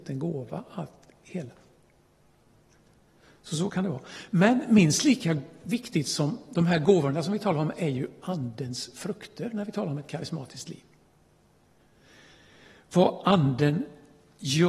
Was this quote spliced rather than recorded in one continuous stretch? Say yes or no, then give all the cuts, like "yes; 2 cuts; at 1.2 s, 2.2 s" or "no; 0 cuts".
no; 0 cuts